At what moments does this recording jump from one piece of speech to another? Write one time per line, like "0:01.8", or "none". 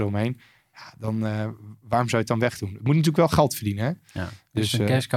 none